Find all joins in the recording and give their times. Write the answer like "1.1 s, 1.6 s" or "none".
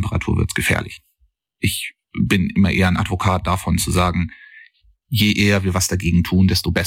none